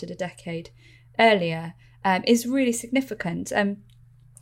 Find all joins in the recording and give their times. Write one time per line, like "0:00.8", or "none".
none